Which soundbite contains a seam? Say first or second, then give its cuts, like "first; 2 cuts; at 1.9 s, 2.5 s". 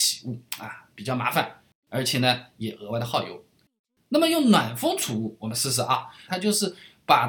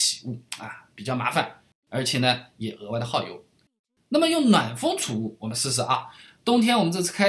first; 1 cut; at 6.3 s